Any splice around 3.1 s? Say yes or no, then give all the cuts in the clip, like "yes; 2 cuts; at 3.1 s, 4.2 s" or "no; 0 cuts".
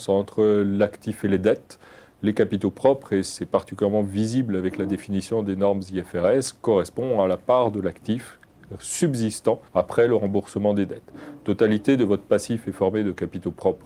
no; 1 cut; at 9.7 s